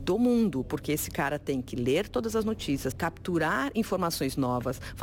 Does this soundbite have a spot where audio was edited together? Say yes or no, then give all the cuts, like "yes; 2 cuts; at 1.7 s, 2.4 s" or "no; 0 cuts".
yes; 1 cut; at 2.9 s